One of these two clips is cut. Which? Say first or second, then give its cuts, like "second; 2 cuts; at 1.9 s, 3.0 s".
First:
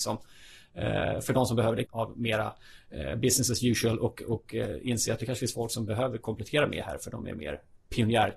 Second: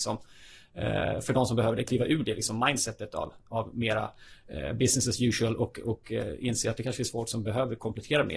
first; 1 cut; at 1.8 s